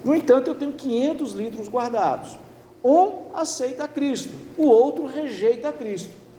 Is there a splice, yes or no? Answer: yes